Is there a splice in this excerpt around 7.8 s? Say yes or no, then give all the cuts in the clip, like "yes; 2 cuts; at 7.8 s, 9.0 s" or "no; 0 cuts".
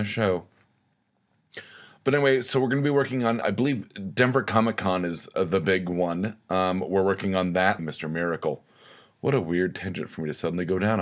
yes; 2 cuts; at 3.4 s, 7.8 s